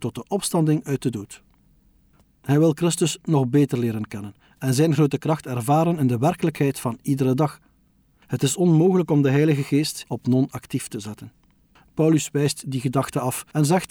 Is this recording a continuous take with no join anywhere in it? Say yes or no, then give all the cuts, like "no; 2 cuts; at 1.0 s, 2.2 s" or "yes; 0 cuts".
no; 3 cuts; at 2.2 s, 10.0 s, 11.8 s